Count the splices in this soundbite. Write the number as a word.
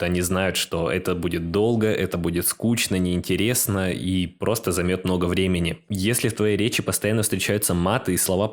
one